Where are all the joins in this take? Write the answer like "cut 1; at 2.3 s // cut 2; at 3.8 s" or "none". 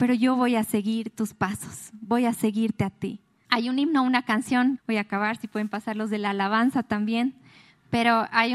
cut 1; at 3.4 s // cut 2; at 4.8 s